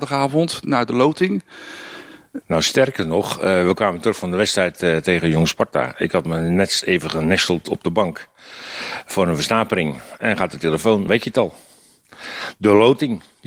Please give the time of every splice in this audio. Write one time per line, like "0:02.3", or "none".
0:02.4
0:11.1